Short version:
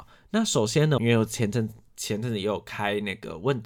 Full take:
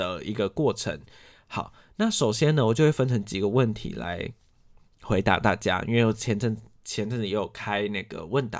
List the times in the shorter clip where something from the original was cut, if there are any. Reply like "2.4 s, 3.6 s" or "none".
1.0 s